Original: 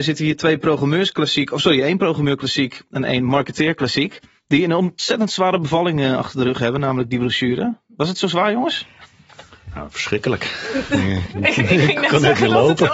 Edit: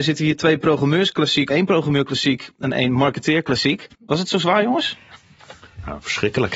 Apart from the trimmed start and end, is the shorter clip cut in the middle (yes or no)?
yes